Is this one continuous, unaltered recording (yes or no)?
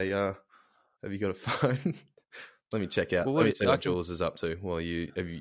yes